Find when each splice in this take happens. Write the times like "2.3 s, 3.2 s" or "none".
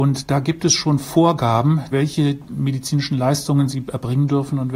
1.9 s